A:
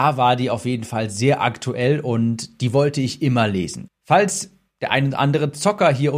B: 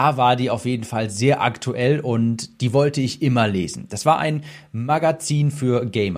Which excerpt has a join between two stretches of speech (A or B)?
A